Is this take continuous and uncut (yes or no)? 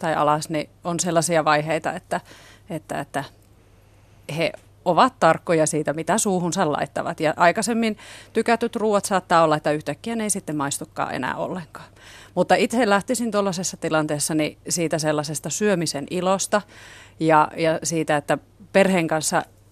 yes